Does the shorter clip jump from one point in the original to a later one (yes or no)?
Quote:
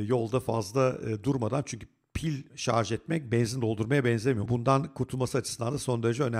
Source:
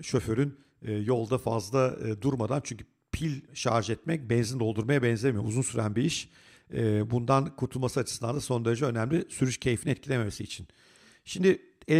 yes